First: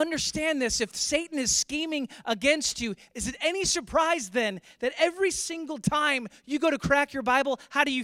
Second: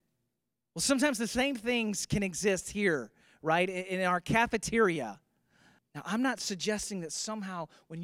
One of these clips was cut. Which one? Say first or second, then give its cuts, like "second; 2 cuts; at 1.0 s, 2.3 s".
second; 1 cut; at 5.8 s